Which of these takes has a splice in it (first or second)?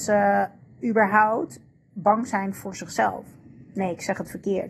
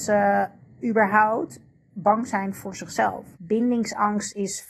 second